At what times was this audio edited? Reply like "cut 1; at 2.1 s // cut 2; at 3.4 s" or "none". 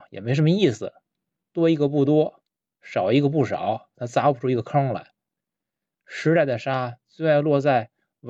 none